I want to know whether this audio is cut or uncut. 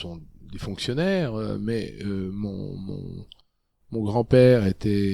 uncut